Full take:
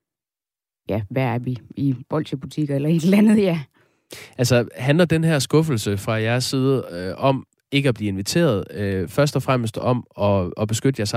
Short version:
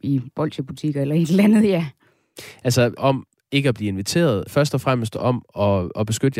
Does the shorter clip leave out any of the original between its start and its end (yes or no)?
yes